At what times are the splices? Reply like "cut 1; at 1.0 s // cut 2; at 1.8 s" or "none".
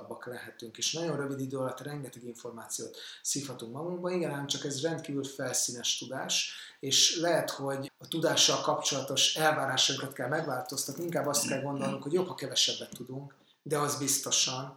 none